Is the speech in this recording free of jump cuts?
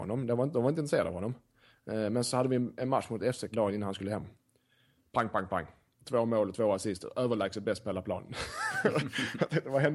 no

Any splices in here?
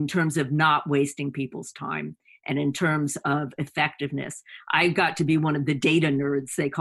no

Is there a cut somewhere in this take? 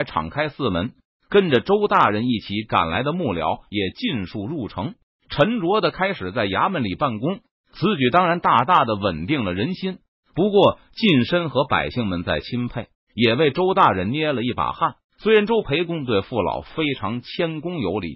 yes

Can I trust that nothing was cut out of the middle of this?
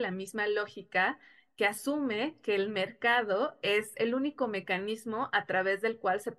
yes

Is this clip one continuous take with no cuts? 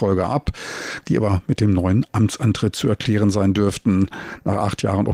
no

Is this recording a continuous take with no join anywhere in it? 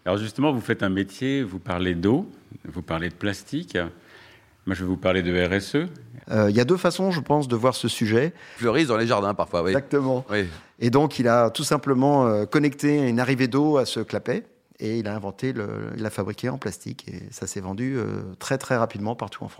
no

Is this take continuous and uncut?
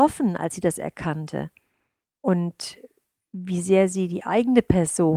no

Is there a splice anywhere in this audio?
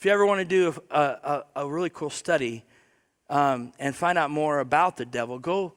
no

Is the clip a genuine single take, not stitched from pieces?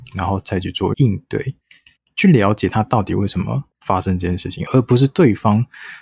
no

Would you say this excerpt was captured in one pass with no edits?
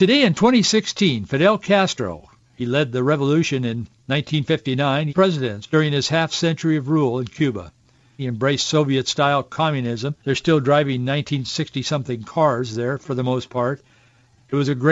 no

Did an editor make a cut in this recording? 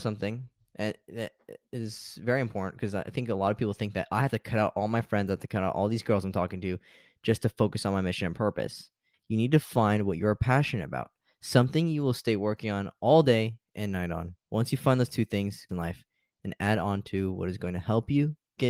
yes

